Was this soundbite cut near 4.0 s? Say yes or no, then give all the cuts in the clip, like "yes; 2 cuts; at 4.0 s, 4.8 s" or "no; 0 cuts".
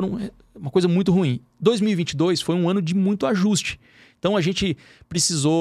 no; 0 cuts